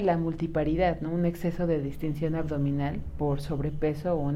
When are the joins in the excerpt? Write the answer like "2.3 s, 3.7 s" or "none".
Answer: none

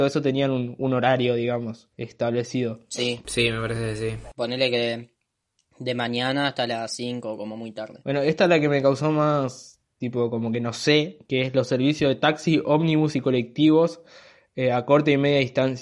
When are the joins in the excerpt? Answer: 1.9 s

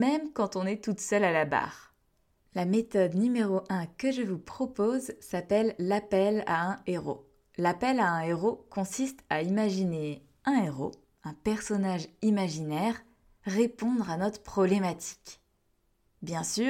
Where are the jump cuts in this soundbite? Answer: 2.4 s

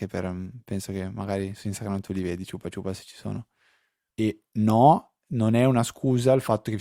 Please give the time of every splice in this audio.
4.1 s

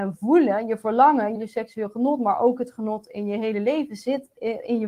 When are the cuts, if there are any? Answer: 1.4 s

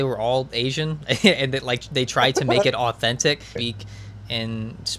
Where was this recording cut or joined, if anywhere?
3.6 s

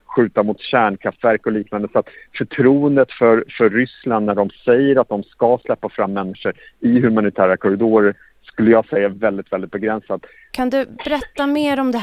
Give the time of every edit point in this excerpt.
10.5 s

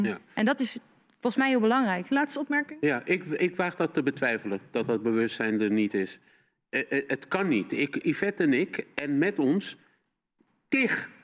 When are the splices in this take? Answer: 8.0 s

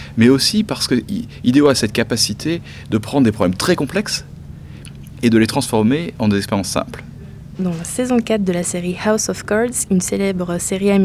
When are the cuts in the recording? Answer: 7.5 s, 9.9 s

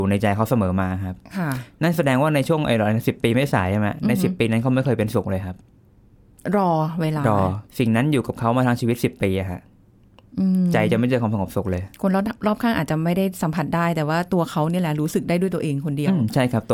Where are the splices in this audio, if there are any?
7.7 s, 11.9 s

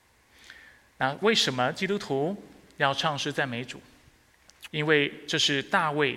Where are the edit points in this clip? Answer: 4.7 s

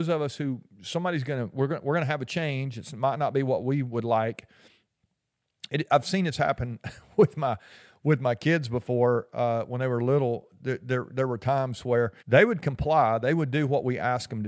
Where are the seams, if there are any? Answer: 12.2 s

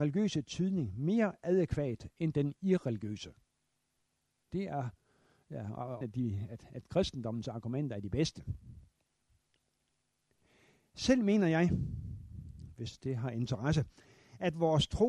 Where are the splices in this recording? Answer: 4.5 s, 6.0 s

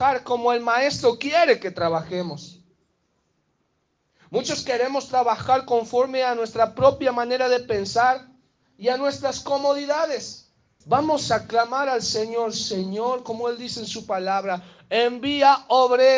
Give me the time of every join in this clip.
10.8 s

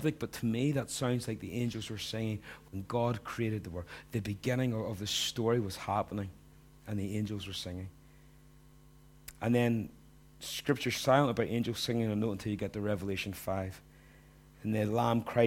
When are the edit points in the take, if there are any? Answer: none

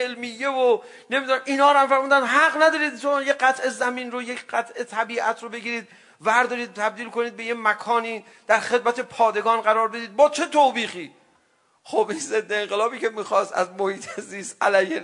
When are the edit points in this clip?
none

